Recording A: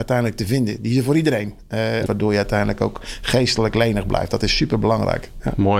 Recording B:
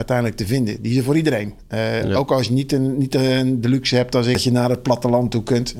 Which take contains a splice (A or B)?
A